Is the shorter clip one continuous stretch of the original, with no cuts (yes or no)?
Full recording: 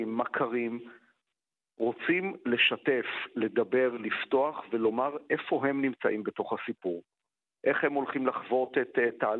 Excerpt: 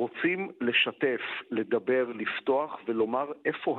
yes